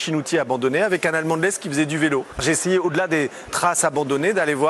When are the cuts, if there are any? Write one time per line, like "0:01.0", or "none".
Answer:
0:02.3